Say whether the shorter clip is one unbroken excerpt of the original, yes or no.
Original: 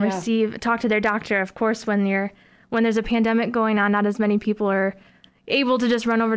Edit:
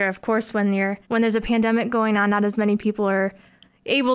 no